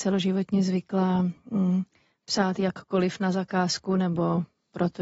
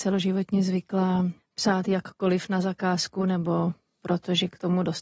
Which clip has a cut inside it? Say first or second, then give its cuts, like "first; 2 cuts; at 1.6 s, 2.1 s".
second; 1 cut; at 1.4 s